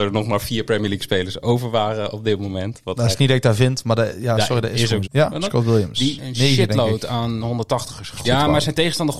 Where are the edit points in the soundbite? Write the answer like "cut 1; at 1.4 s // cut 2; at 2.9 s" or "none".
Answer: cut 1; at 5.0 s // cut 2; at 6.2 s // cut 3; at 8.2 s

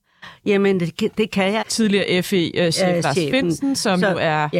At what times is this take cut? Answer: cut 1; at 1.6 s

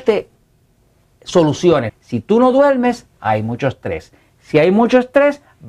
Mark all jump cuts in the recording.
cut 1; at 1.9 s

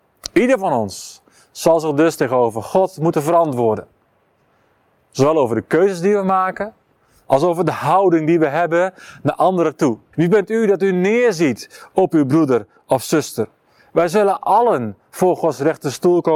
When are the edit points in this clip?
cut 1; at 10.1 s

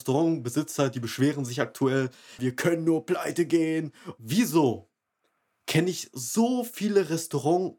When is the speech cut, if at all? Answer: cut 1; at 2.4 s

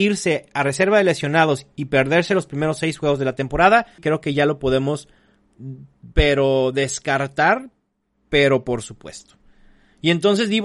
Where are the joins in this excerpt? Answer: cut 1; at 4.0 s

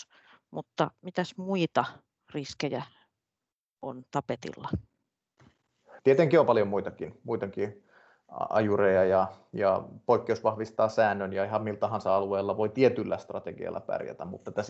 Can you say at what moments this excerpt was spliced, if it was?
cut 1; at 6.0 s

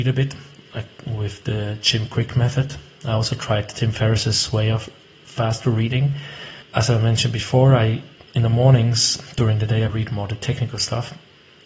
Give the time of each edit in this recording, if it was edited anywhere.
cut 1; at 6.6 s // cut 2; at 9.9 s

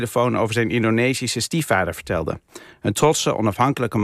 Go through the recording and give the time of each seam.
none

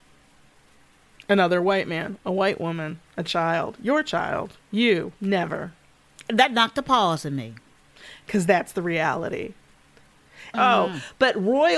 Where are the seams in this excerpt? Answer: cut 1; at 5.2 s // cut 2; at 10.5 s

